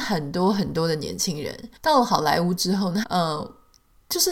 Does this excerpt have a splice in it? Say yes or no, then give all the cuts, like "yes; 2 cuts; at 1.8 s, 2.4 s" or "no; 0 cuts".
yes; 2 cuts; at 1.8 s, 3.0 s